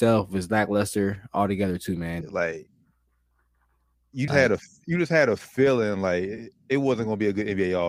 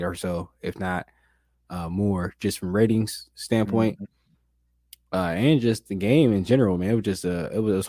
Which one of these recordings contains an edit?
first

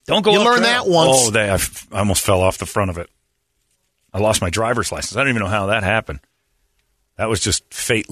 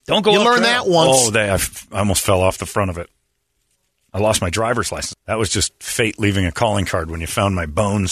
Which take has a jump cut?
second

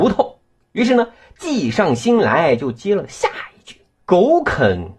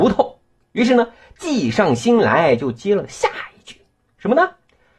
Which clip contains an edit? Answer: first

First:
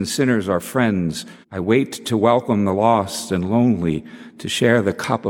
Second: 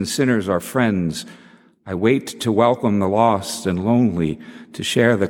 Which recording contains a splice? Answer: first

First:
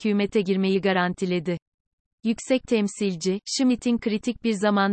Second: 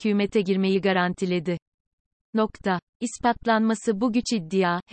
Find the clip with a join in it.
second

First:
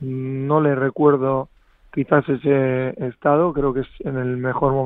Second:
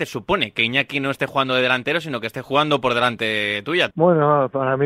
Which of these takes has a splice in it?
second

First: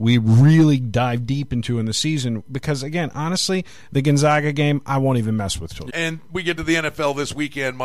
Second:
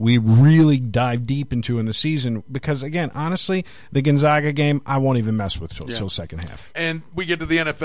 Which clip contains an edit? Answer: first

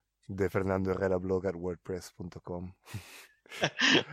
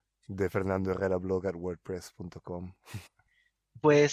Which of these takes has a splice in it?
second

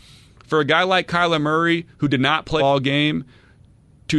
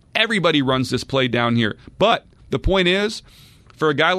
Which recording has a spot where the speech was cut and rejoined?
first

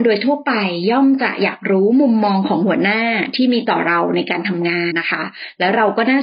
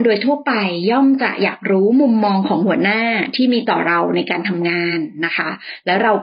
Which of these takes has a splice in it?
first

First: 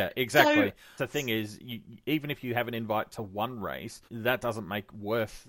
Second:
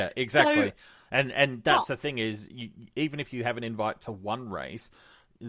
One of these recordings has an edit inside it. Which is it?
first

